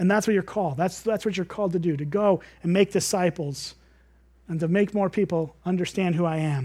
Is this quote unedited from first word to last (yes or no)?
yes